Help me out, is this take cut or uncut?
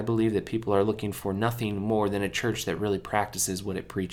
uncut